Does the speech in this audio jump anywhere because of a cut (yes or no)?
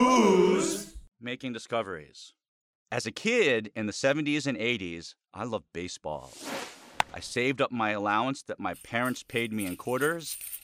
no